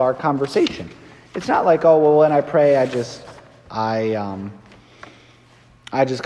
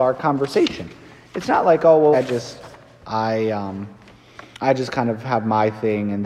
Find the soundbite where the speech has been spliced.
second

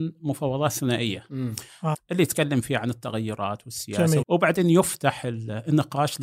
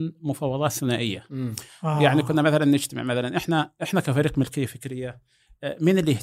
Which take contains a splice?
first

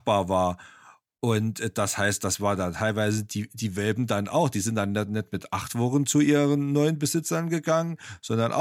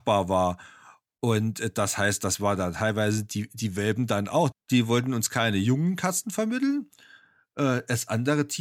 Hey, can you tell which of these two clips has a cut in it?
second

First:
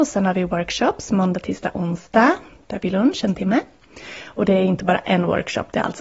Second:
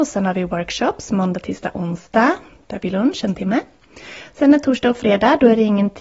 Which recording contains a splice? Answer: first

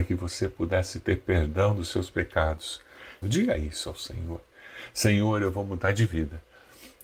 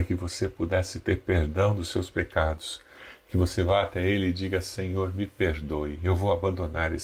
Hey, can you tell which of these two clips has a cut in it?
first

